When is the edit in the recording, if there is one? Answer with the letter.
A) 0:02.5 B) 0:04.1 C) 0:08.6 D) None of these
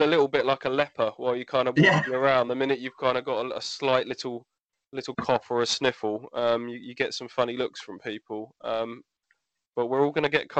D